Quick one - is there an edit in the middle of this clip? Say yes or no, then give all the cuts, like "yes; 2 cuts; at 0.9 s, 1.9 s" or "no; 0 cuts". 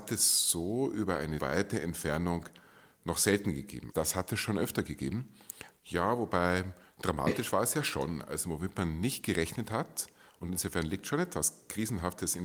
yes; 3 cuts; at 1.4 s, 3.9 s, 5.8 s